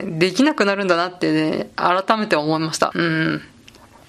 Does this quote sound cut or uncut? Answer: cut